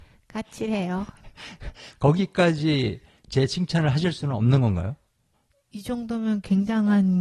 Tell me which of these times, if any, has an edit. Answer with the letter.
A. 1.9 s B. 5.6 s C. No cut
C